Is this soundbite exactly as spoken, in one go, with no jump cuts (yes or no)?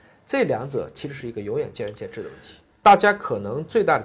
no